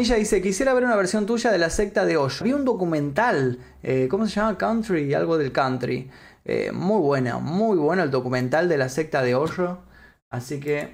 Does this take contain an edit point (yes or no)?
yes